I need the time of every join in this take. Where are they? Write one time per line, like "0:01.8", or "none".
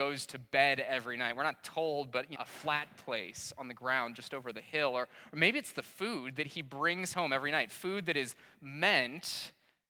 0:02.4